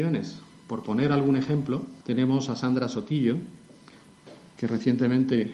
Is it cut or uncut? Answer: cut